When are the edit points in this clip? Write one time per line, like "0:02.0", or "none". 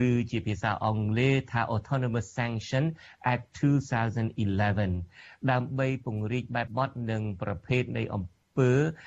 0:06.7